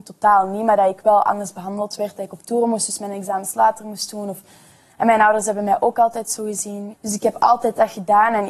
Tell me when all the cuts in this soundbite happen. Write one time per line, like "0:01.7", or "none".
0:06.9